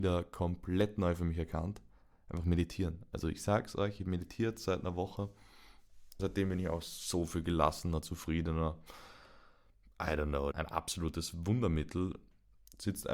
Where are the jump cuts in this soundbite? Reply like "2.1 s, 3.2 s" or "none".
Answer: 6.2 s, 10.5 s